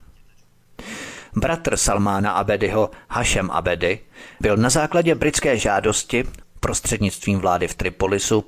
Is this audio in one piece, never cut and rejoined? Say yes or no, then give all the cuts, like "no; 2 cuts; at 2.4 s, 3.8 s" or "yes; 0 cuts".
yes; 0 cuts